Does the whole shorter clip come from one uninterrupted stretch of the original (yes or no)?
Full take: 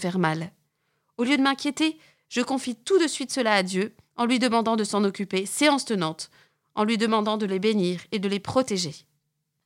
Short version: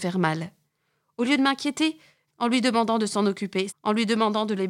no